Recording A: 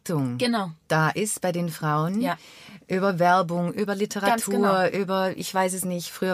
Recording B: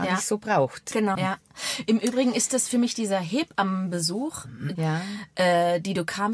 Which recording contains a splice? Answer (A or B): B